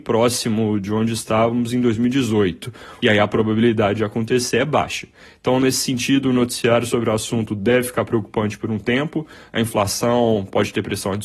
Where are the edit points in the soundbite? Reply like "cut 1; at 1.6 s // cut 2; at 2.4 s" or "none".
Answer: cut 1; at 3.0 s